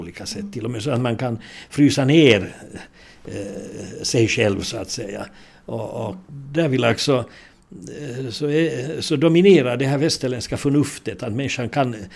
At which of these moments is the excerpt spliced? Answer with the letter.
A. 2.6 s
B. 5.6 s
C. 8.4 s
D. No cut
D